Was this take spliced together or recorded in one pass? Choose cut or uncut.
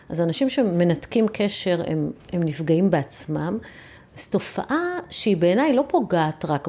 cut